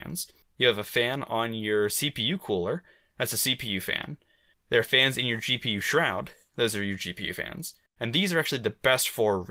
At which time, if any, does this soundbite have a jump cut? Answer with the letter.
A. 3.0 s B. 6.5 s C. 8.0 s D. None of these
C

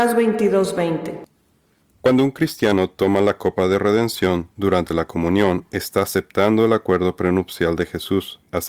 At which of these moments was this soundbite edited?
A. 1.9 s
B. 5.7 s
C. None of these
C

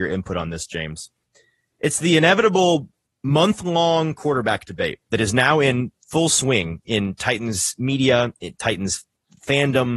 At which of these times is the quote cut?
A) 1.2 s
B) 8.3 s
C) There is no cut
C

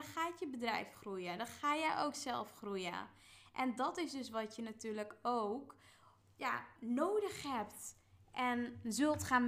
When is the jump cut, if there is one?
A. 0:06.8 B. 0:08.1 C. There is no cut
A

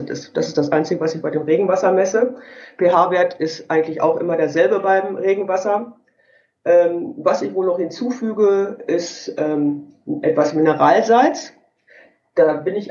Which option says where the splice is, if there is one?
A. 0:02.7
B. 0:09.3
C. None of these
C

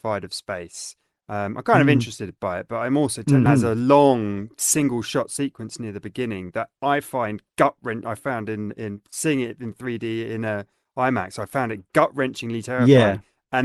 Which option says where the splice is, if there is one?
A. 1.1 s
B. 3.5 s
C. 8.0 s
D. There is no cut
B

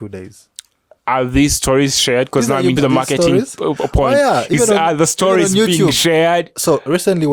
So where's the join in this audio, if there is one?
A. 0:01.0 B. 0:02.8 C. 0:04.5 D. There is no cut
B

